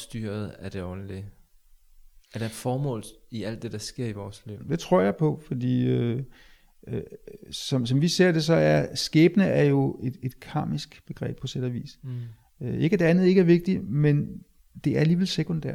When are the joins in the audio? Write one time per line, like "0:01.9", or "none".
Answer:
0:11.4